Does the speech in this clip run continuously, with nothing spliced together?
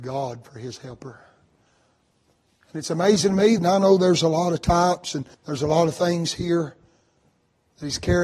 no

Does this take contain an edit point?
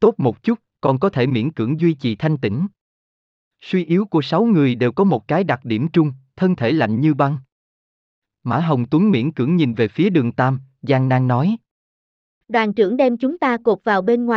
no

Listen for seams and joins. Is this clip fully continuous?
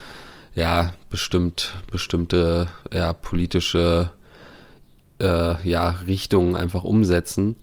yes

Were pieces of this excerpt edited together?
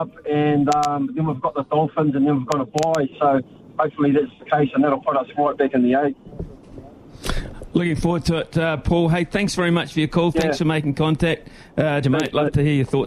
yes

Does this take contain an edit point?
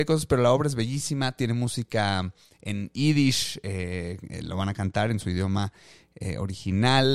no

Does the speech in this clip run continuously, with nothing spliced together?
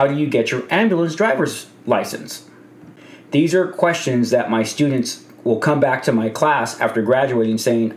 yes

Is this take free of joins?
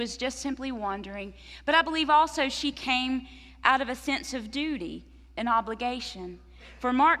yes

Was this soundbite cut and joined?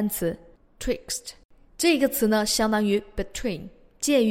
no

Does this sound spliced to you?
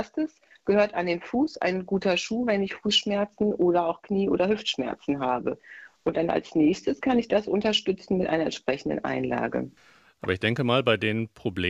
no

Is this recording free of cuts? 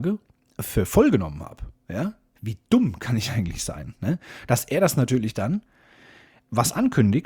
yes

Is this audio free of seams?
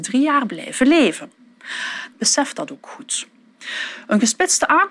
no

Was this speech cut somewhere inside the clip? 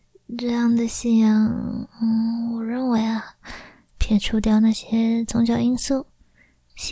yes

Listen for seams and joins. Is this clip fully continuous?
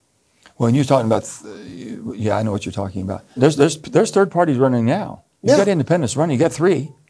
no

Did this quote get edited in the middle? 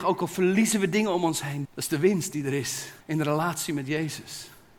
yes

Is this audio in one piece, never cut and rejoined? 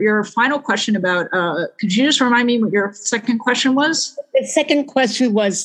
yes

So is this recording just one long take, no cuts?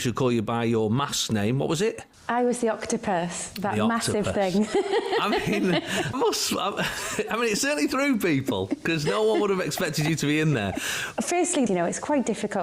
no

